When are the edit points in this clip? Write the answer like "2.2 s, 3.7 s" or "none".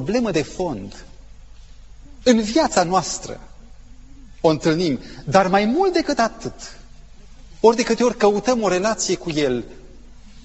7.6 s

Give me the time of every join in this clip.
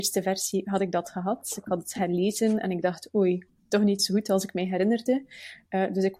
none

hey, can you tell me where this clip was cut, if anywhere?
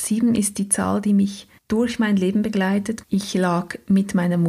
1.6 s, 3.0 s

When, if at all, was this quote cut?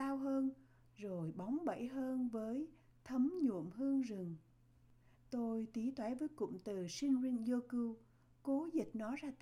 0.9 s, 5.1 s

